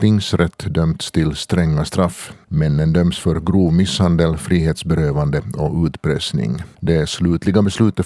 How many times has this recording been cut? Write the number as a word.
two